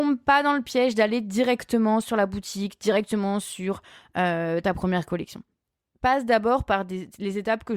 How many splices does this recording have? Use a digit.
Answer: 1